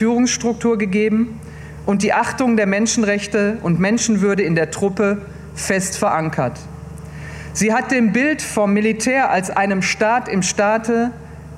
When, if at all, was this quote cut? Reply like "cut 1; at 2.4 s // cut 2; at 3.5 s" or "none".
none